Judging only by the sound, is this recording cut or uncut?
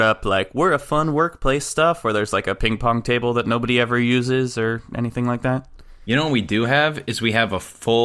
uncut